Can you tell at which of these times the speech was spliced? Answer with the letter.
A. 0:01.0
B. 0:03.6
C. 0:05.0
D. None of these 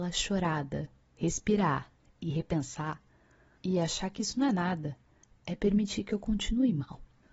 B